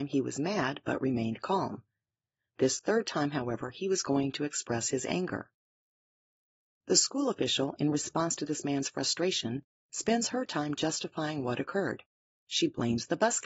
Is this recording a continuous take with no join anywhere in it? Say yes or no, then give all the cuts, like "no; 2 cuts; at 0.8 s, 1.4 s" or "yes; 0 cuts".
yes; 0 cuts